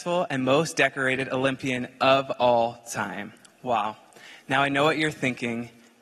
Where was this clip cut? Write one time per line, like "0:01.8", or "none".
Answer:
0:03.5